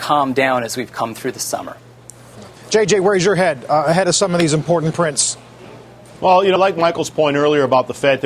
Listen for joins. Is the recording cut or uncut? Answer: cut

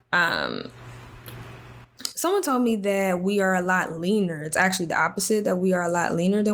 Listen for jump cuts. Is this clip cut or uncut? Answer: uncut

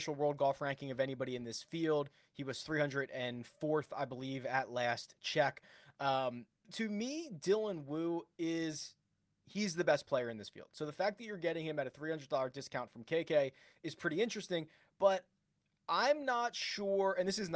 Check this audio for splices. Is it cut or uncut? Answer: cut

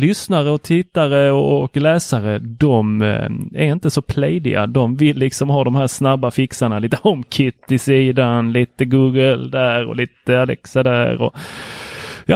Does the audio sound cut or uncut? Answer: uncut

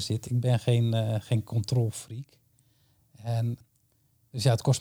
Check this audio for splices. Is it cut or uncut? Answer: uncut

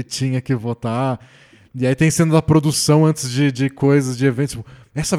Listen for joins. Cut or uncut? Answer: uncut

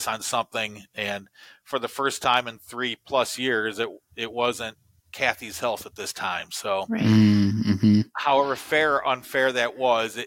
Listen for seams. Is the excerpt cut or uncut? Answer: uncut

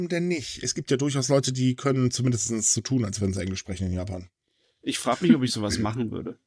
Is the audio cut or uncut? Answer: uncut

